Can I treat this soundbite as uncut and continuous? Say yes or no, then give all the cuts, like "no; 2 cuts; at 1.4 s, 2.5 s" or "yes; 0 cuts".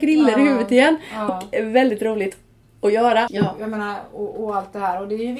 no; 2 cuts; at 1.3 s, 3.3 s